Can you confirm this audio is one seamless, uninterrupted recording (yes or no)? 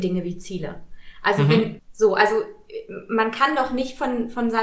no